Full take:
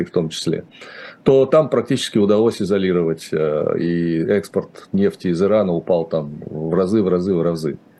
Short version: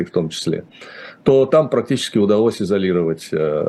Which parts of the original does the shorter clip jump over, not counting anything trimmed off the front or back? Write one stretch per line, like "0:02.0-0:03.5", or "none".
none